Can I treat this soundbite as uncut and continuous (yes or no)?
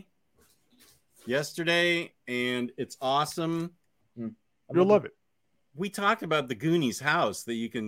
no